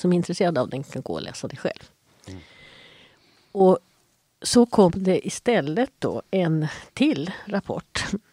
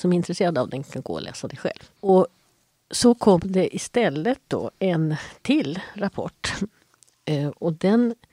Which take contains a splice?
second; 1 cut; at 2.0 s

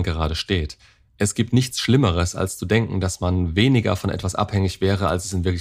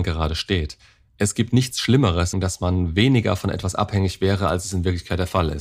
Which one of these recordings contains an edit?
second; 1 cut; at 2.3 s

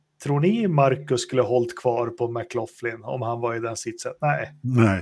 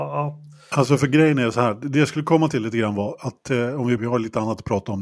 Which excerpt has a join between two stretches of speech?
second; 1 cut; at 4.0 s

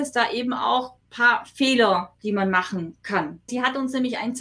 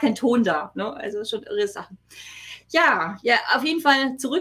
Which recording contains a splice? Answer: first; 2 cuts; at 1.0 s, 3.5 s

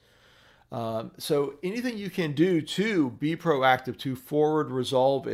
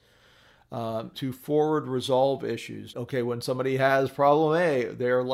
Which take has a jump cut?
second; 2 cuts; at 1.1 s, 2.9 s

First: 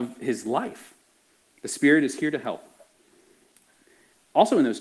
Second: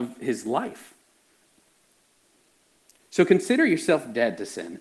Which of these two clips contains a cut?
first; 1 cut; at 1.4 s

